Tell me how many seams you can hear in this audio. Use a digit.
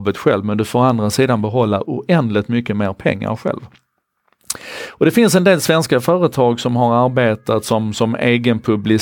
0